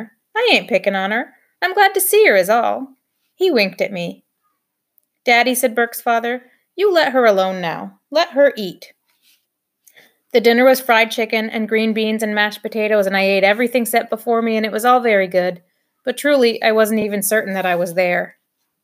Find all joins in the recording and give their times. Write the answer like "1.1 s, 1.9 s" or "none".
none